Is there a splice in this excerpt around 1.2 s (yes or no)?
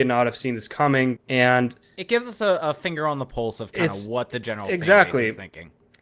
yes